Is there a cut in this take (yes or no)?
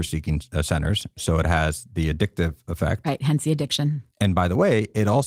no